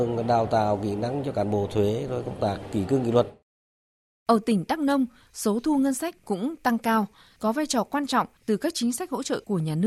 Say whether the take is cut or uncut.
uncut